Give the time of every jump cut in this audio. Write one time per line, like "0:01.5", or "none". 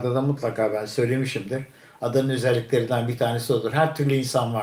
none